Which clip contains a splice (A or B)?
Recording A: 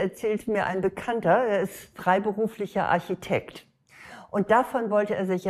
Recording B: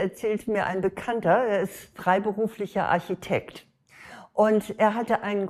A